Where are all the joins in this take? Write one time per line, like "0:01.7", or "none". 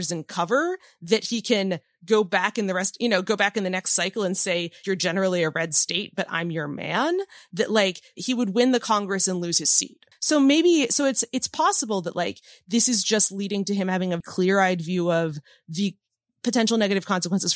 0:04.8
0:10.1
0:14.2